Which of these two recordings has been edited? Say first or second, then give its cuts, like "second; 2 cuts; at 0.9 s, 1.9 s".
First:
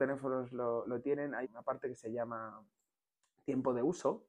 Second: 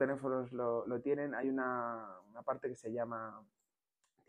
first; 1 cut; at 1.4 s